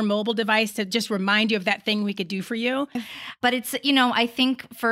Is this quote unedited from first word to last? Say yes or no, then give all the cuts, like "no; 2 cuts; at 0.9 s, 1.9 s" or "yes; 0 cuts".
no; 1 cut; at 3.0 s